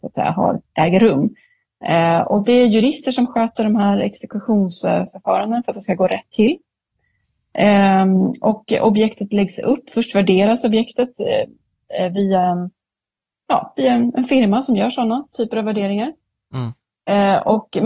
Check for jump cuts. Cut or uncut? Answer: uncut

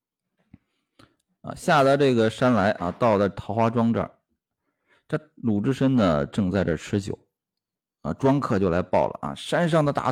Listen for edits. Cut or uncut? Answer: uncut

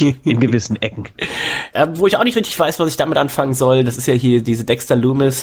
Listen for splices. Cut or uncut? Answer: cut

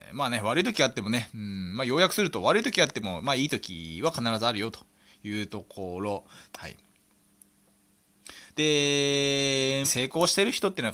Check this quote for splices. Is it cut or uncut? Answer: cut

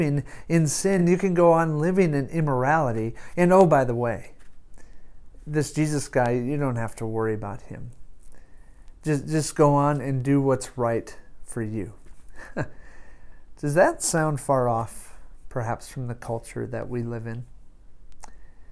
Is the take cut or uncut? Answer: uncut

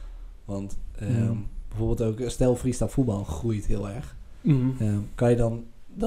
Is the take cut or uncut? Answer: uncut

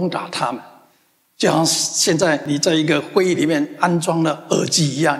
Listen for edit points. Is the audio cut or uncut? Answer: uncut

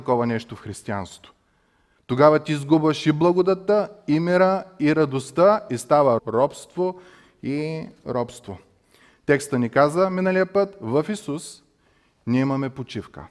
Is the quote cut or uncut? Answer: cut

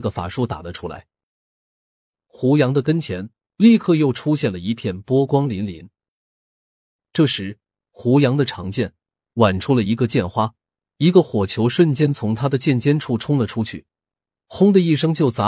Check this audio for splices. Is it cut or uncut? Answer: uncut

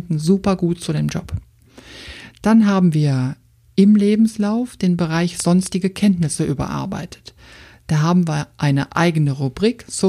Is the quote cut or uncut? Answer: uncut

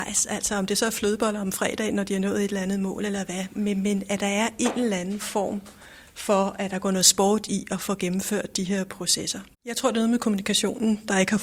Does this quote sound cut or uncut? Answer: cut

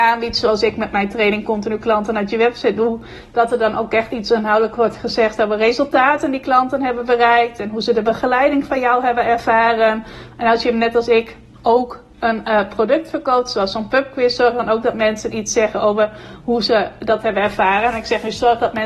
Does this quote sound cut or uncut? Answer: uncut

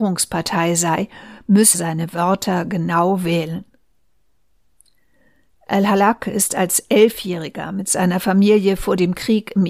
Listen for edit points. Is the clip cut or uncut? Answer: cut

